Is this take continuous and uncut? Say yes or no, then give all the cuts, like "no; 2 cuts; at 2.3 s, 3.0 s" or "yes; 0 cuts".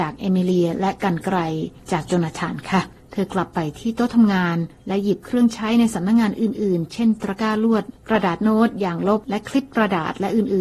yes; 0 cuts